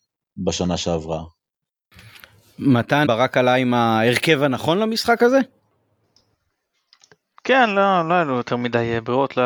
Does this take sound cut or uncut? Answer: cut